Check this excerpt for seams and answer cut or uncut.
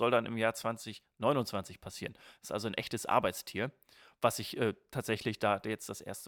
uncut